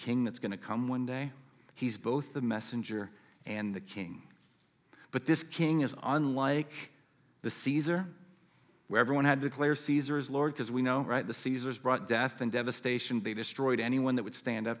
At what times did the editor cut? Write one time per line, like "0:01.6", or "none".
none